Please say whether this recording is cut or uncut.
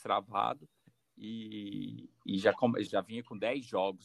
cut